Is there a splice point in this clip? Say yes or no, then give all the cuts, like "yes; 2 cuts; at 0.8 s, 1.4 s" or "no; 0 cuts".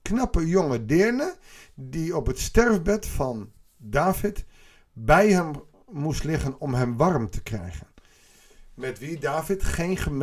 no; 0 cuts